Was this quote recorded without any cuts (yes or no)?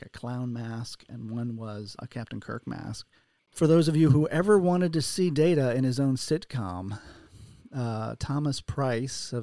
no